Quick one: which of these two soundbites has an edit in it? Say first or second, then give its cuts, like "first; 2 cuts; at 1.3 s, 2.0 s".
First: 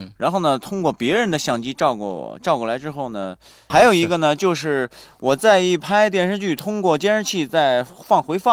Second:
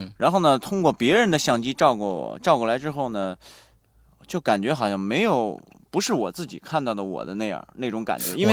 first; 1 cut; at 3.7 s